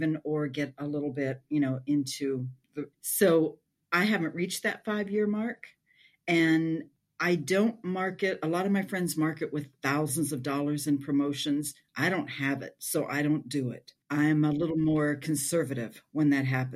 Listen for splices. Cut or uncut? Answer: cut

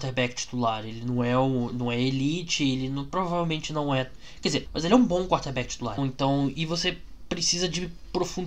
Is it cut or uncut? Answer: cut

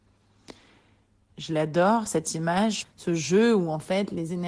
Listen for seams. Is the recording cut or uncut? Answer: cut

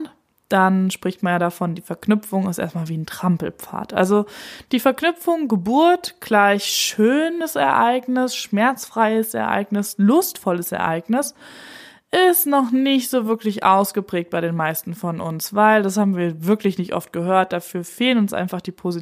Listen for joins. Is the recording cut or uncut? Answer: uncut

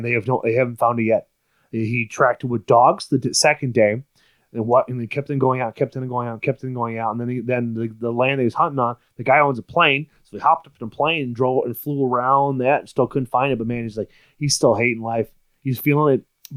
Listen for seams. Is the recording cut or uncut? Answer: uncut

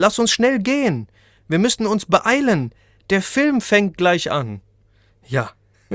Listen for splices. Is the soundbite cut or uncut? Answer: uncut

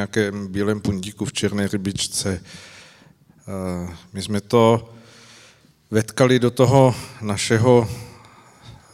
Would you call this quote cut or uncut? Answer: uncut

